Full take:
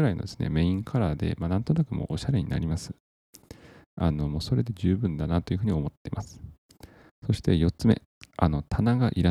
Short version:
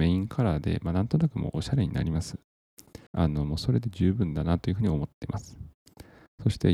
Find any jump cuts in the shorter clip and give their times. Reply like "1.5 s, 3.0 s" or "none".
3.1 s